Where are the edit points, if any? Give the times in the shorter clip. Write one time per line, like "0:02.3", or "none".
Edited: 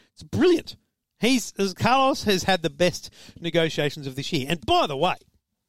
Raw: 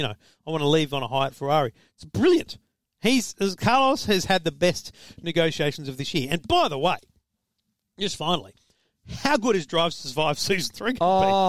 none